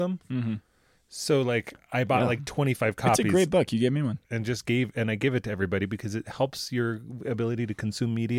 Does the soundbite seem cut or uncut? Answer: uncut